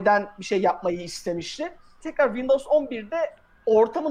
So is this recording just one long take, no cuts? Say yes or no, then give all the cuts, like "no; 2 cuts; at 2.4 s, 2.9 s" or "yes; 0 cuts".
no; 1 cut; at 2.0 s